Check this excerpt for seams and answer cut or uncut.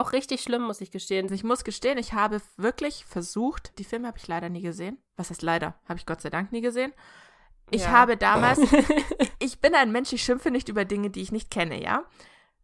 cut